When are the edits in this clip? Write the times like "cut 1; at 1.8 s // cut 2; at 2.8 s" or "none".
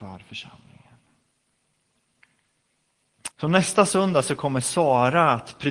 cut 1; at 3.3 s

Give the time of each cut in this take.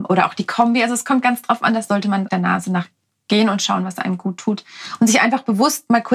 cut 1; at 2.3 s

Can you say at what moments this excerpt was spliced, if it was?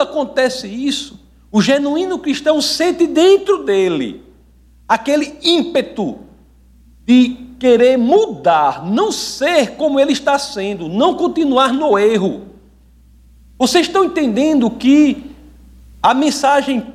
none

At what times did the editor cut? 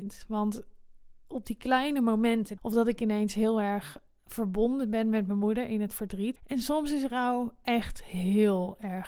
cut 1; at 2.6 s // cut 2; at 6.4 s

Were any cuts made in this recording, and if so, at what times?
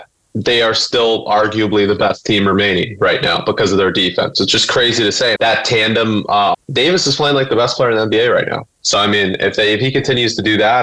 cut 1; at 5.4 s // cut 2; at 6.5 s

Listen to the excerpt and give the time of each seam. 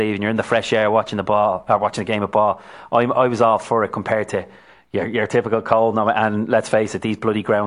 none

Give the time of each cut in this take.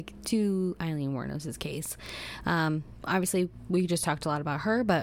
none

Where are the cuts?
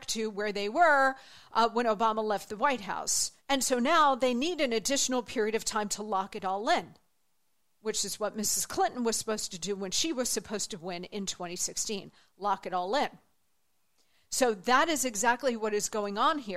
cut 1; at 3.4 s

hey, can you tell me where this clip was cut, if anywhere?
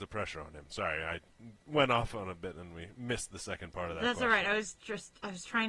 none

